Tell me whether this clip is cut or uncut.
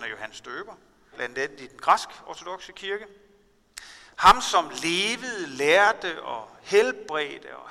cut